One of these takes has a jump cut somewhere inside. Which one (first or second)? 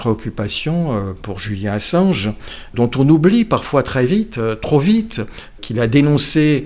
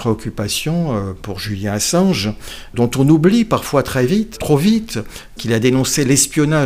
second